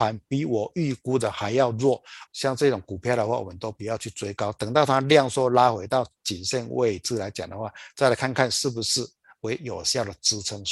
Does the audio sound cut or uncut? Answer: cut